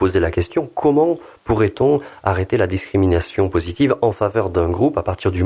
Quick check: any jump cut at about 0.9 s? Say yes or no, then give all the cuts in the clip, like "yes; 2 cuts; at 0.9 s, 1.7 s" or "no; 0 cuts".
no; 0 cuts